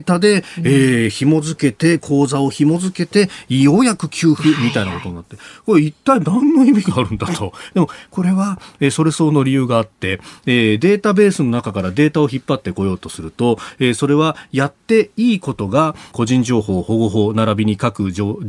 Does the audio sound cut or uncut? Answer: cut